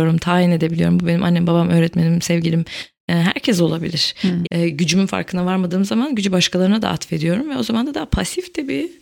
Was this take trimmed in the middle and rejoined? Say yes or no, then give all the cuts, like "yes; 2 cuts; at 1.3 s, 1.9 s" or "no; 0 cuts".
yes; 1 cut; at 4.4 s